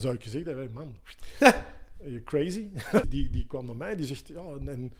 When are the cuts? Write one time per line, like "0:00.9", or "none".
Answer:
0:03.0